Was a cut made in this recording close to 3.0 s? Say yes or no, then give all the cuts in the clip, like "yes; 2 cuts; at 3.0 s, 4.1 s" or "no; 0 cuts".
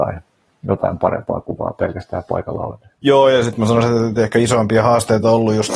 yes; 1 cut; at 3.0 s